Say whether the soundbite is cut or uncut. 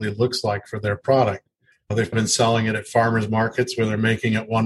cut